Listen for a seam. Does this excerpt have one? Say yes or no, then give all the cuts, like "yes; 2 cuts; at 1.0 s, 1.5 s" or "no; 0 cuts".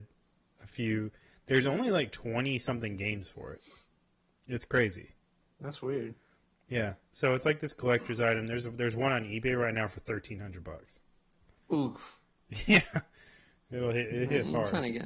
no; 0 cuts